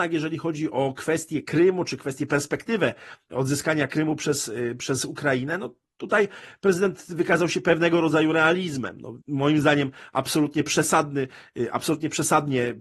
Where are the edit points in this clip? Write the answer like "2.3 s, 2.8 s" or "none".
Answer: 9.2 s